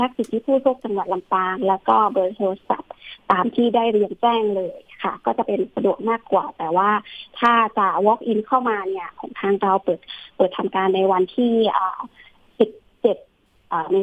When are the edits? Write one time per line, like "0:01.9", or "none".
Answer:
none